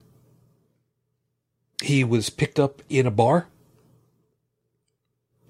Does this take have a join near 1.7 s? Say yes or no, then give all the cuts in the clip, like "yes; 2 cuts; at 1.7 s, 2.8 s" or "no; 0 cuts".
yes; 1 cut; at 1.7 s